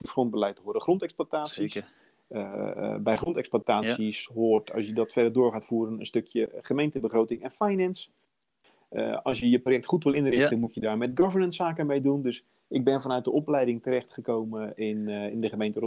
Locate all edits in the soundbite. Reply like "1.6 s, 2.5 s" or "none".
none